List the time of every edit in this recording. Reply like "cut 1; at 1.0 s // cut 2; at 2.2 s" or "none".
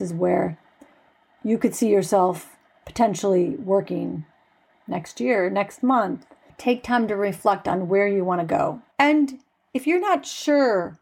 cut 1; at 6.5 s // cut 2; at 8.9 s